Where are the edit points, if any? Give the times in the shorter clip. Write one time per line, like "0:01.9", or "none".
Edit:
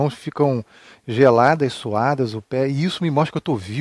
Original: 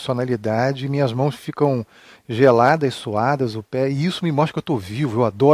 none